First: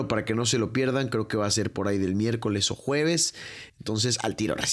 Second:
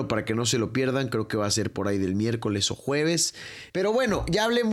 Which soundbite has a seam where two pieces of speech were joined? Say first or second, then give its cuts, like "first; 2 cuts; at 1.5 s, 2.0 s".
second; 1 cut; at 3.7 s